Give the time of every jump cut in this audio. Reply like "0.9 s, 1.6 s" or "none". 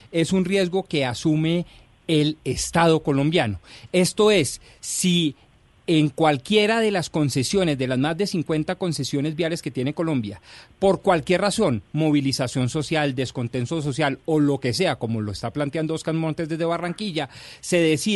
none